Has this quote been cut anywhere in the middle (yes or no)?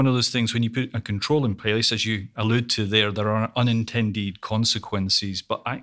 no